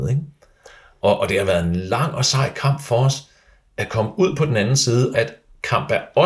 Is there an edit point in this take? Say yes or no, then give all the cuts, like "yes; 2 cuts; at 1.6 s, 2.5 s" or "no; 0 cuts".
yes; 1 cut; at 5.1 s